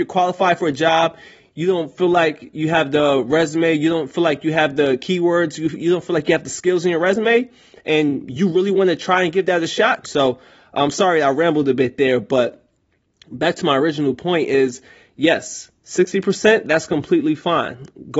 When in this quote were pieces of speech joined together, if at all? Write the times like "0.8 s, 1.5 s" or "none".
10.0 s